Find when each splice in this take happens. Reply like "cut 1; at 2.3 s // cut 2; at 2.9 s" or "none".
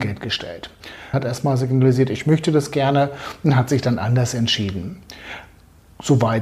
cut 1; at 1.1 s